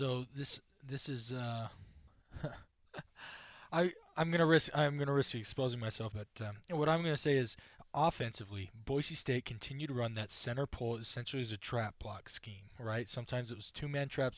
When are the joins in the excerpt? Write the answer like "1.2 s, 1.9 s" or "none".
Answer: 6.1 s

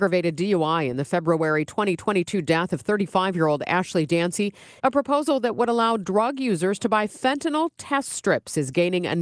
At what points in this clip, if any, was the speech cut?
4.8 s

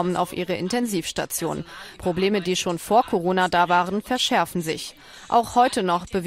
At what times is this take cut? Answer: none

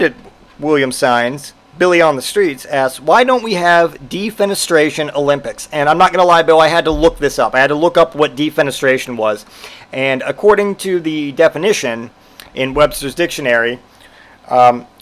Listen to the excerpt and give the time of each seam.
none

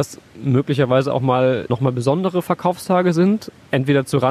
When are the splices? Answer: 1.7 s

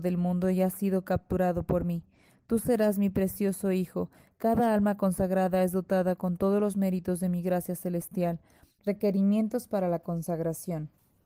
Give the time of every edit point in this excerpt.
8.8 s

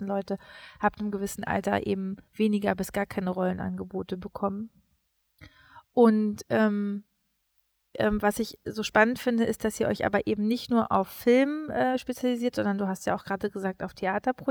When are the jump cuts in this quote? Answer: 2.3 s, 7.9 s

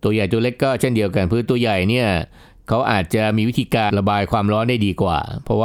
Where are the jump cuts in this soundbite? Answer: 3.9 s

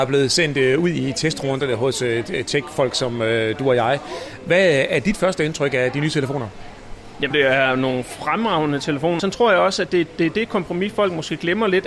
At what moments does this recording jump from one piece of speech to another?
7.3 s, 9.2 s

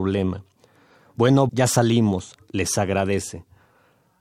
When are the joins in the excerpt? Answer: 1.5 s

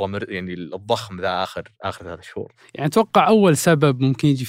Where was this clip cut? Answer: none

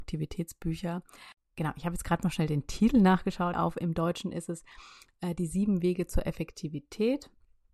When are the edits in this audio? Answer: 3.5 s

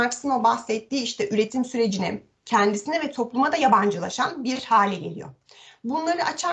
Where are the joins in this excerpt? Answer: 2.4 s

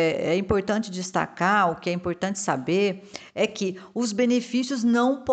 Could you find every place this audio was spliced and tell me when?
none

